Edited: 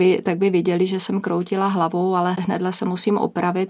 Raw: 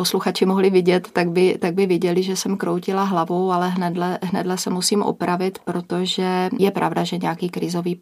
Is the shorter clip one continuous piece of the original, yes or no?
no